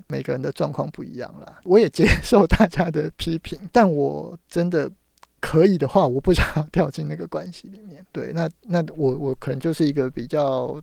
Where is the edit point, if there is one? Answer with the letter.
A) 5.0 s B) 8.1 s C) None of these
B